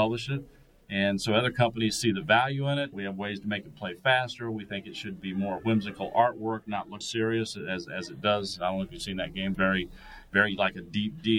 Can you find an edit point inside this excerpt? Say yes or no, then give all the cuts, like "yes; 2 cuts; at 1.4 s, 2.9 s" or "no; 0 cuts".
yes; 3 cuts; at 2.9 s, 7.0 s, 9.5 s